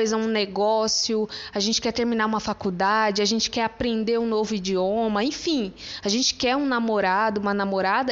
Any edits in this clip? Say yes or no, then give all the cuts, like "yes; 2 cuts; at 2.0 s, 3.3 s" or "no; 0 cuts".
no; 0 cuts